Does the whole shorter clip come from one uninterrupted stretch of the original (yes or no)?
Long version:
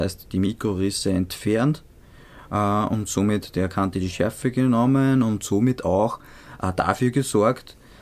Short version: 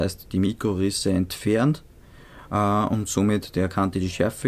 yes